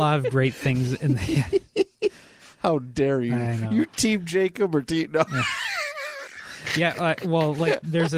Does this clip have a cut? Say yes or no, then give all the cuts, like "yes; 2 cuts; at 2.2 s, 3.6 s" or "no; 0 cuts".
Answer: no; 0 cuts